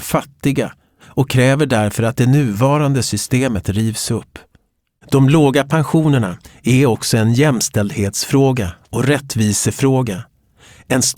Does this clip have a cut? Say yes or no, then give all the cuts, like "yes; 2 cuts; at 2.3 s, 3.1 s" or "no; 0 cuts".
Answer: no; 0 cuts